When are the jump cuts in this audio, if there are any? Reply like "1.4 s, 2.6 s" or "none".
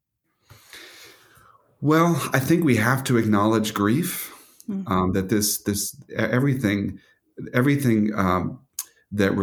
none